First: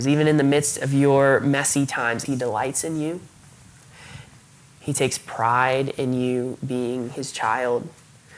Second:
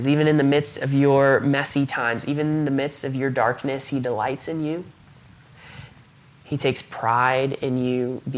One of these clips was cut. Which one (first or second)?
first